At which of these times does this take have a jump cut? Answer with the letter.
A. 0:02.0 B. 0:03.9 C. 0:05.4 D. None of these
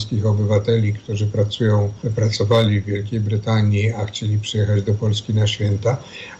A